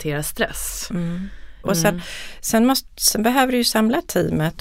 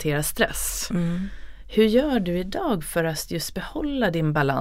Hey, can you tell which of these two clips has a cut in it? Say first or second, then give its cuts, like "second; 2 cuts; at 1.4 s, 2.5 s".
first; 1 cut; at 1.6 s